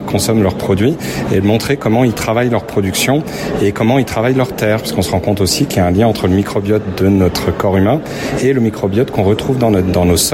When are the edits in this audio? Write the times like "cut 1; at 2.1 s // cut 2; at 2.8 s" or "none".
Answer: none